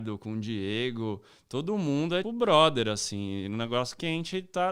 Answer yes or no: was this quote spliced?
yes